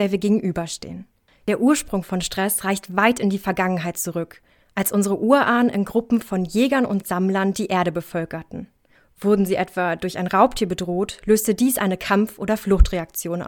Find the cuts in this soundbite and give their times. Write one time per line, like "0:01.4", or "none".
none